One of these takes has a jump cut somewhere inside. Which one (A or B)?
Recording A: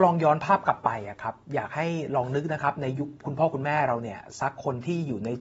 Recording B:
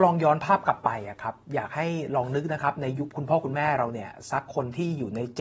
B